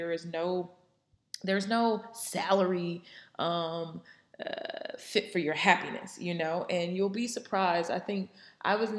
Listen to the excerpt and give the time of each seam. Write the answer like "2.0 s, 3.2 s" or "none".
none